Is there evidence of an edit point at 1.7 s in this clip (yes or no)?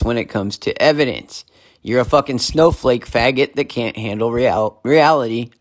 no